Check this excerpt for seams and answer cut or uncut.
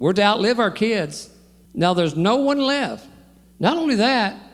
cut